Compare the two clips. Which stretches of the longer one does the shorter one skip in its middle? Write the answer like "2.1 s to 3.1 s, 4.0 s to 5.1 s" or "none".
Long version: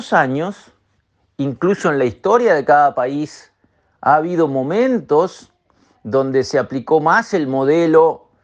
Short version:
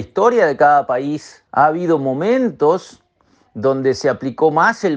3.6 s to 4.0 s